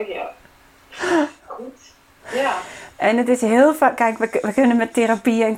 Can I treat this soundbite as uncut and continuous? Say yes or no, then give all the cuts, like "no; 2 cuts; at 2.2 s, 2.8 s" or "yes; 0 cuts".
yes; 0 cuts